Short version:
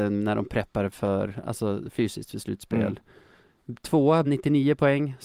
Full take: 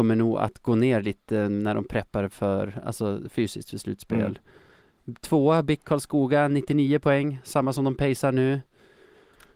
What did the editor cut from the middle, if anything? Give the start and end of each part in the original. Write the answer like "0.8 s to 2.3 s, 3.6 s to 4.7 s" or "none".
5.6 s to 6.5 s